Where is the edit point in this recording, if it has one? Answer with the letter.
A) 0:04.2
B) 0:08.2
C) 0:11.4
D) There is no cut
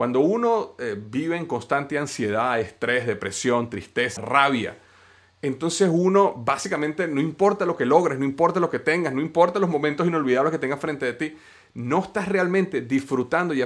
A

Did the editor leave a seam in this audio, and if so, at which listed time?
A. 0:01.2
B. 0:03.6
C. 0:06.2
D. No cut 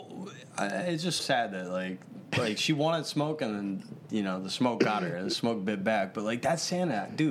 A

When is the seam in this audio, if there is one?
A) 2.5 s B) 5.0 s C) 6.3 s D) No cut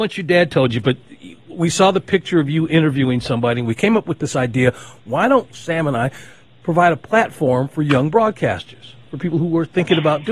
D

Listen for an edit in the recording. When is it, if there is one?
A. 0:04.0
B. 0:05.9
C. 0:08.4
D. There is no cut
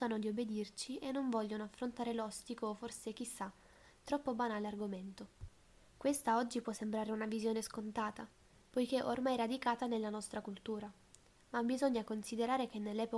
B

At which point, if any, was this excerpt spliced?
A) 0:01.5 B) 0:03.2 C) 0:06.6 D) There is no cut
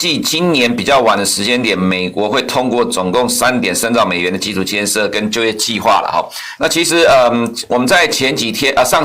C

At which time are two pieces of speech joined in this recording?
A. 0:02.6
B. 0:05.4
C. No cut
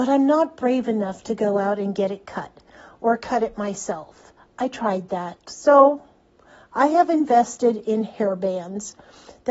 B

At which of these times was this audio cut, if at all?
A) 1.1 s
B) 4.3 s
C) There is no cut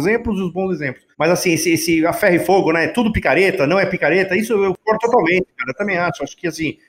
A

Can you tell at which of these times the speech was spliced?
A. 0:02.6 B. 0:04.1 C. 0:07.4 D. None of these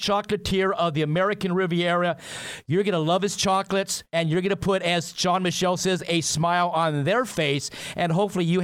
B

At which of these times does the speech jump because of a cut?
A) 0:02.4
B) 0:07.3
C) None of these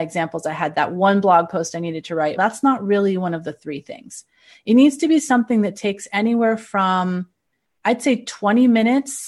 A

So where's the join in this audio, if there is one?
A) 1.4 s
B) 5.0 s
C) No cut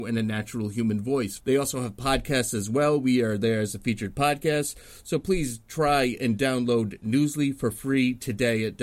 A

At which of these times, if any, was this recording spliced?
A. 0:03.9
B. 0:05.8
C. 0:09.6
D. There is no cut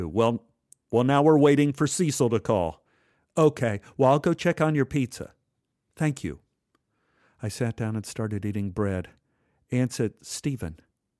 D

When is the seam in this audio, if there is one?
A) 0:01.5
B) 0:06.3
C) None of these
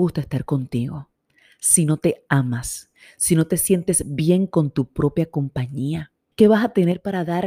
B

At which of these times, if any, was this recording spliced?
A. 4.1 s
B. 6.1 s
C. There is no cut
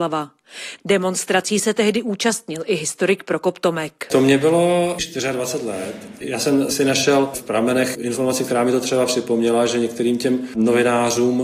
C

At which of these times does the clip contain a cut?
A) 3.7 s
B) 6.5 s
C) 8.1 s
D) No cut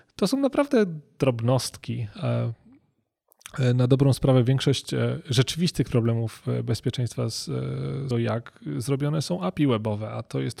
C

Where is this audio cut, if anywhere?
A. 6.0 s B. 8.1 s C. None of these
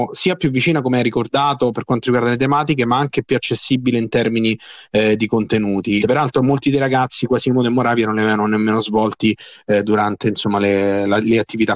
A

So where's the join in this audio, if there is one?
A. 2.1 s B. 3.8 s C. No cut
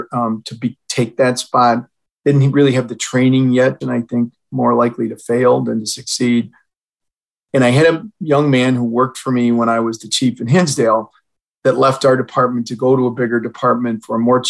B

